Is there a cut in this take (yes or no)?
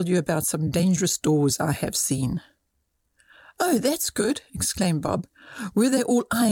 no